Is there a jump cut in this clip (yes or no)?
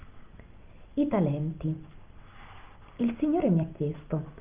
no